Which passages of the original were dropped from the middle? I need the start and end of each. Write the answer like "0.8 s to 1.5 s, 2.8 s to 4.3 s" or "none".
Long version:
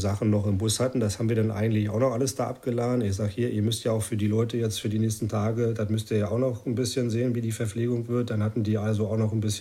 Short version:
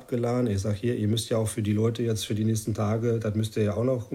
none